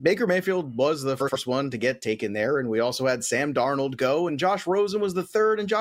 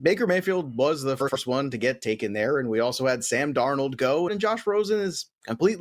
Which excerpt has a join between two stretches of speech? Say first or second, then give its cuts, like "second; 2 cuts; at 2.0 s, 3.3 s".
second; 1 cut; at 4.3 s